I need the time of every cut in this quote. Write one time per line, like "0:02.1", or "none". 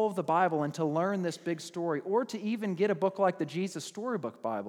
none